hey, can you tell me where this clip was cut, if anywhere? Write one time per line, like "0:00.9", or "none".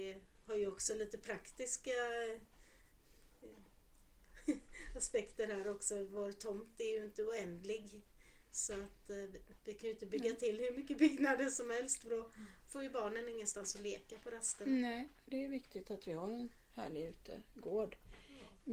0:09.6